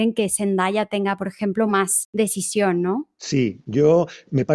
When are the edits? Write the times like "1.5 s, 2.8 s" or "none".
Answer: none

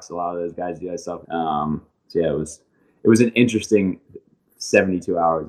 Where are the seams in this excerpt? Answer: 1.2 s

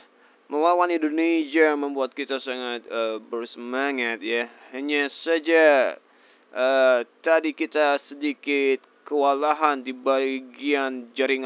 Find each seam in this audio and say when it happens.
none

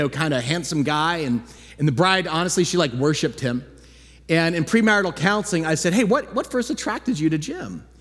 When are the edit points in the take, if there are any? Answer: none

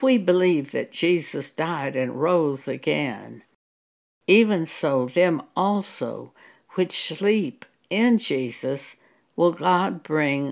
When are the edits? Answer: none

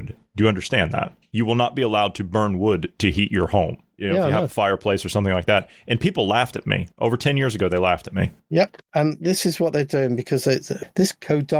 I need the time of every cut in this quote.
none

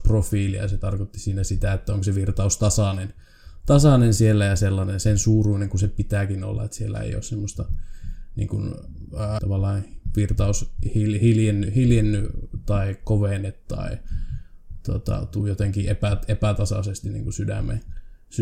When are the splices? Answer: 9.4 s

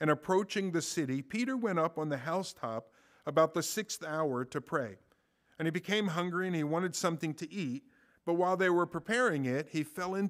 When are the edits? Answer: none

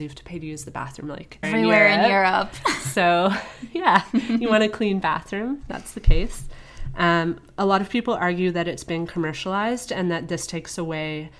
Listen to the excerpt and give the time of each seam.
1.4 s

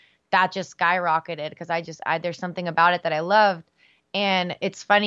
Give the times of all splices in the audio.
none

